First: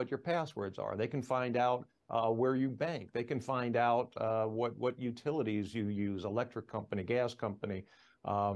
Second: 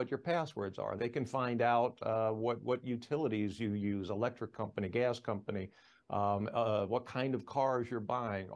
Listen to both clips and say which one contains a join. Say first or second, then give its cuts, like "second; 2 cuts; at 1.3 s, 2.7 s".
second; 1 cut; at 1.0 s